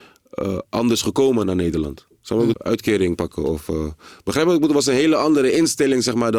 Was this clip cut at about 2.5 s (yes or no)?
yes